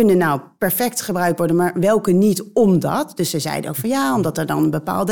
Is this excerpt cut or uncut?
uncut